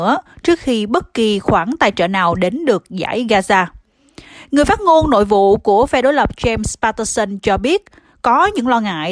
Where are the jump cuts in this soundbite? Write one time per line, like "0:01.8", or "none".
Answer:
none